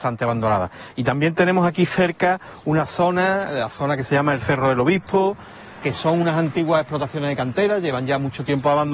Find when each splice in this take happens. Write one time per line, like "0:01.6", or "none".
0:05.8